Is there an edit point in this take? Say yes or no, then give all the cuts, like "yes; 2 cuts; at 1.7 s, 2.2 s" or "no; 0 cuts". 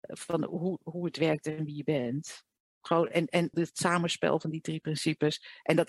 yes; 1 cut; at 3.5 s